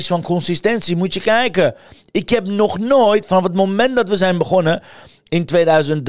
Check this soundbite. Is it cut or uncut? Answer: uncut